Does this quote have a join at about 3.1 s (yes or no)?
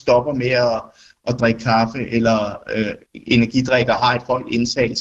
yes